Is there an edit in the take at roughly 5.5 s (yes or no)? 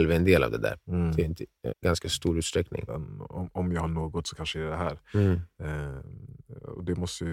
no